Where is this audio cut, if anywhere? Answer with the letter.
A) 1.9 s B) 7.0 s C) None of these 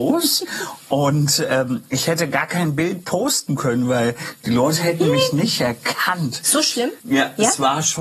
B